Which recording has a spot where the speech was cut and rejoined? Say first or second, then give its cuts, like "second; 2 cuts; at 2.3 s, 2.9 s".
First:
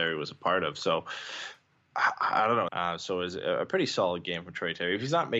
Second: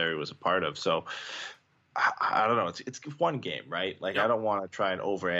first; 1 cut; at 2.7 s